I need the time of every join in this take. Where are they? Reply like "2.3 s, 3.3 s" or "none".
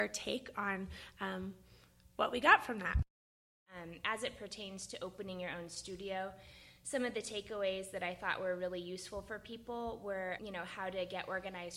10.4 s